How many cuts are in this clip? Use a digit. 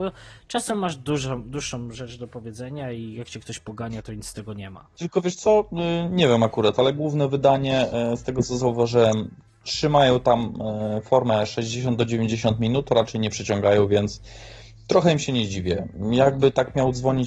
0